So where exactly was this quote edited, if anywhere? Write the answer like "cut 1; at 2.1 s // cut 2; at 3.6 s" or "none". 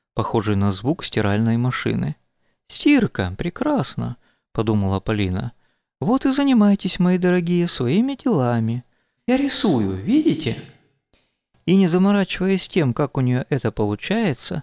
cut 1; at 9.2 s